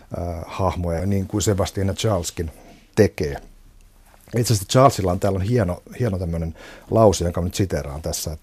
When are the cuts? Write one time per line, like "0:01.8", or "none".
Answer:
0:01.0